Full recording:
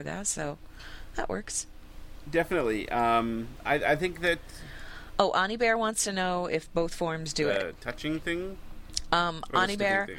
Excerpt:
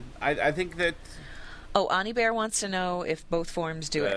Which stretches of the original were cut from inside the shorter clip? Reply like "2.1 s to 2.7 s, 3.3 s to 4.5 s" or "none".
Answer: none